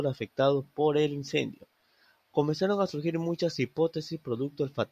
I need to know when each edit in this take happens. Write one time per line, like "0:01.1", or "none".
none